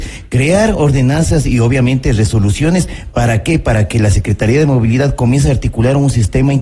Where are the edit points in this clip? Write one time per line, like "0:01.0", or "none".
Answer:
none